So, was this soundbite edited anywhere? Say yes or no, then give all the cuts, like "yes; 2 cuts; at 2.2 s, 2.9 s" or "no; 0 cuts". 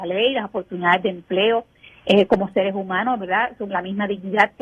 no; 0 cuts